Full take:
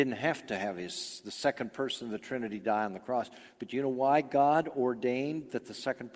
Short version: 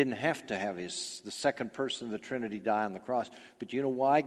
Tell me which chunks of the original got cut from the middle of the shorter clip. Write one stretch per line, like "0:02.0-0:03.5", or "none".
none